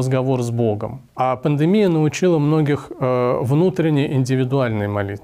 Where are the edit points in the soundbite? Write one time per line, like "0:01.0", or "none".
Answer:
0:01.1